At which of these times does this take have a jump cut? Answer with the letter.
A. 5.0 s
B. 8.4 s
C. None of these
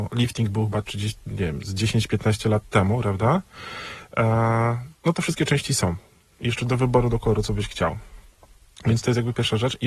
A